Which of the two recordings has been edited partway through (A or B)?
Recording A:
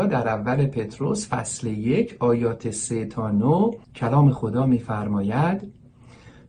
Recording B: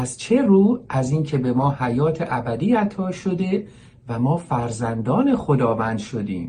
A